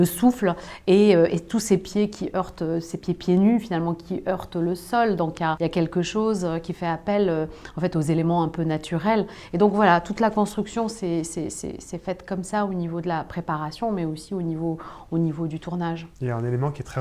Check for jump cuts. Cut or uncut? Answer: cut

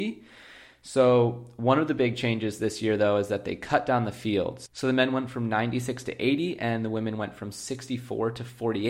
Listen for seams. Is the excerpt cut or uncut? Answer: uncut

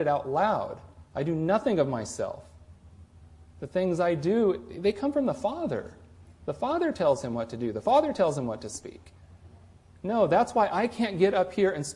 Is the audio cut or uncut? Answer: cut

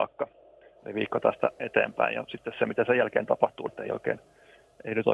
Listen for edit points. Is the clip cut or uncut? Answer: cut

